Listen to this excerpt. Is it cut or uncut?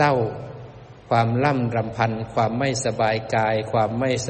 cut